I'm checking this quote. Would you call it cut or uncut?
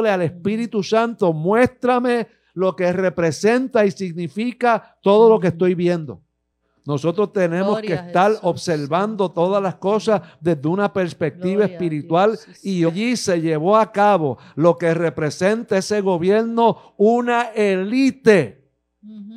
uncut